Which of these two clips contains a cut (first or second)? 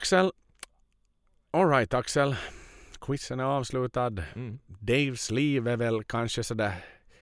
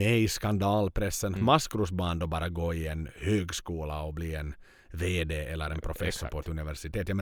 second